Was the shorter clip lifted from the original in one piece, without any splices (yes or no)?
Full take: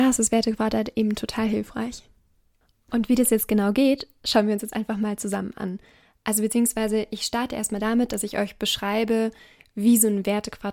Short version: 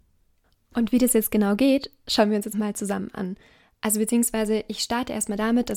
no